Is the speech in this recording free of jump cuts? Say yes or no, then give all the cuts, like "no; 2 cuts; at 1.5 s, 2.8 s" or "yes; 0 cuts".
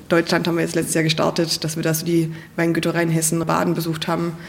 no; 1 cut; at 3.4 s